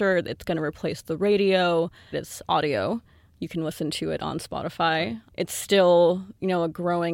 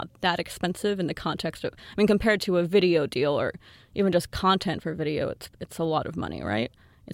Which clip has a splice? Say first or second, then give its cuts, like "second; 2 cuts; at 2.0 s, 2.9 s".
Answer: first; 1 cut; at 2.1 s